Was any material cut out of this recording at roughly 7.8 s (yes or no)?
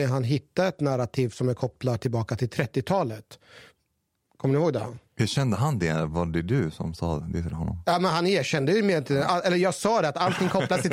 no